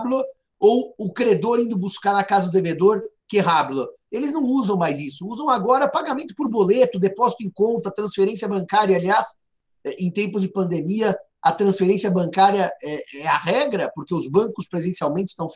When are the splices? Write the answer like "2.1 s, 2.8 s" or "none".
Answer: none